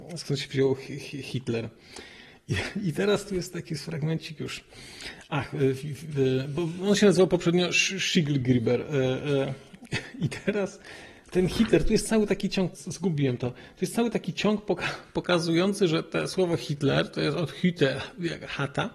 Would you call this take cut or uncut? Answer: cut